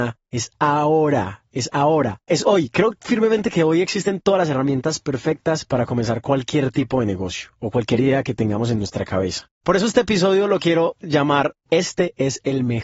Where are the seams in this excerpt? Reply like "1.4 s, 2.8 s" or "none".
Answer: 2.3 s, 9.6 s